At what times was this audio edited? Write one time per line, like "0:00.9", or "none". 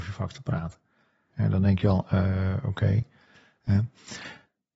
0:01.3